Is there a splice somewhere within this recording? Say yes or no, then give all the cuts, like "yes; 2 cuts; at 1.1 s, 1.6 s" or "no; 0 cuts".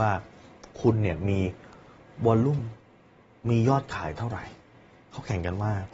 no; 0 cuts